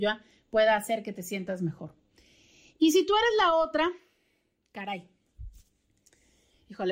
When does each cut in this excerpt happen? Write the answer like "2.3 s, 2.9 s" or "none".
none

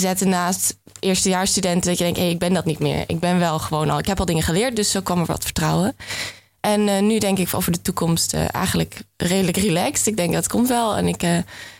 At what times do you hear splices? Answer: none

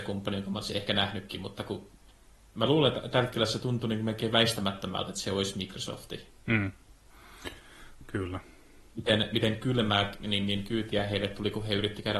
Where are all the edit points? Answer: 8.9 s

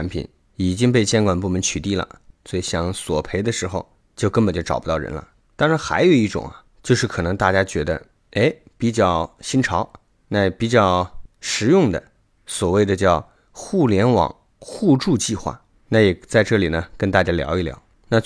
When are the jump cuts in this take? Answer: none

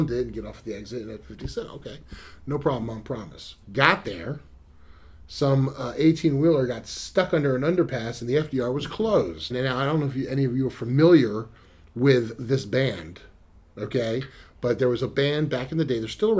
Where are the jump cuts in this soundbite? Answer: 3.6 s, 9.5 s

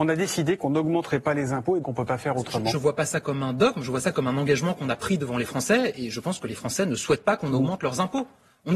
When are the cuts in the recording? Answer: 1.8 s

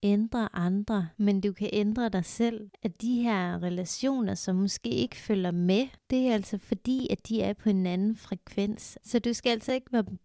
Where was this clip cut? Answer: 9.0 s

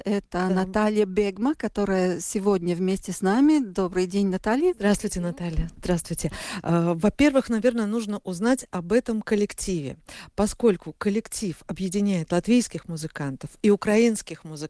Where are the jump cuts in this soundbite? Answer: none

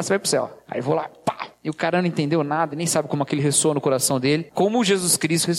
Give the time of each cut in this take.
2.7 s, 4.5 s

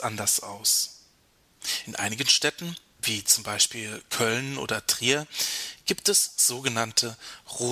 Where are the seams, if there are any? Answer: none

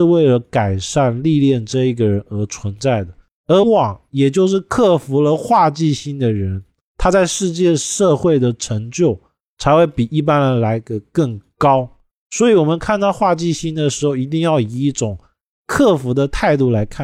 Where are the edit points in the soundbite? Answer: 3.6 s

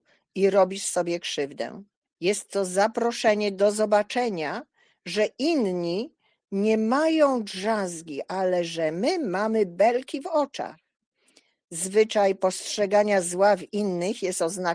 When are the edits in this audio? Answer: 2.0 s

